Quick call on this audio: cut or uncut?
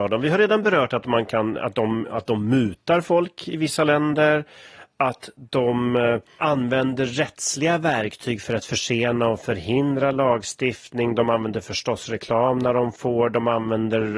uncut